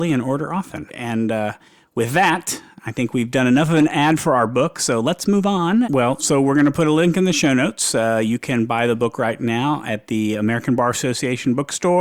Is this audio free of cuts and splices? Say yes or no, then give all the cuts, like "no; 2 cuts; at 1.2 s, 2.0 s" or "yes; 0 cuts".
no; 1 cut; at 5.8 s